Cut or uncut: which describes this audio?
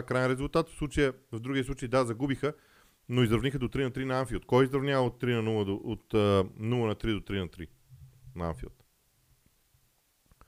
uncut